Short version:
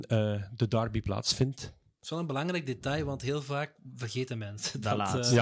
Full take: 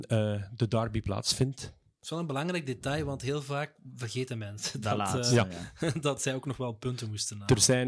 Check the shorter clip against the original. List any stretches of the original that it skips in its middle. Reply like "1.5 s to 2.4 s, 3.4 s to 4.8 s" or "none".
none